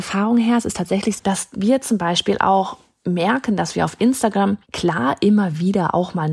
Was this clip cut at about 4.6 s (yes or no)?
yes